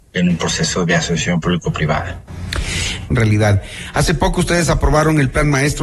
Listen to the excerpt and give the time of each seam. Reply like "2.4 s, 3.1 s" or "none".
3.1 s